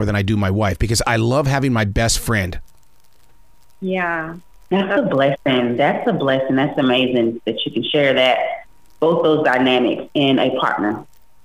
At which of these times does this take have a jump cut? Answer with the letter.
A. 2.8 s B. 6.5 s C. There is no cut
C